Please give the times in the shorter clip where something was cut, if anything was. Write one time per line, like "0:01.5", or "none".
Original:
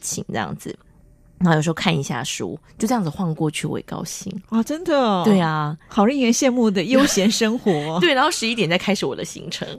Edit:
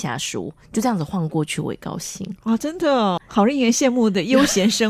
0:03.2